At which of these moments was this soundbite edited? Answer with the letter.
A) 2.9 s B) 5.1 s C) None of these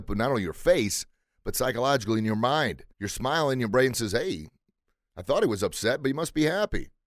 A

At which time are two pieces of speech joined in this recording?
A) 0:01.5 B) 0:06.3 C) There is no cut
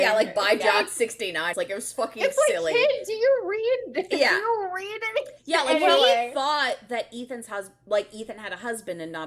A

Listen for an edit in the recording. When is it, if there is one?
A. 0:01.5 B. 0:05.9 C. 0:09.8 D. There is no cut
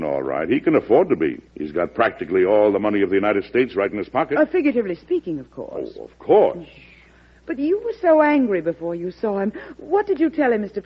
A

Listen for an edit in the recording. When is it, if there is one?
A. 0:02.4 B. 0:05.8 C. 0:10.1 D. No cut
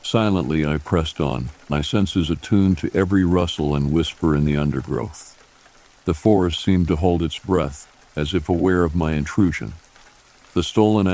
D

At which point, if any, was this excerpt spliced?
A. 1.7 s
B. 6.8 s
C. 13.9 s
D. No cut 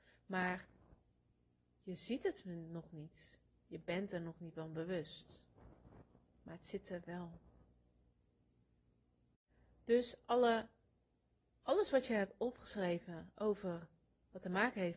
D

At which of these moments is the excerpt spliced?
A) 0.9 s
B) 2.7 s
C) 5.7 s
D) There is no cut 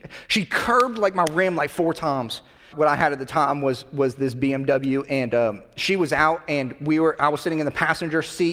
B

